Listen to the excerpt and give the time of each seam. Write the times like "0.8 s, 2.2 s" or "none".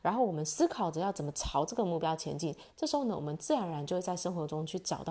none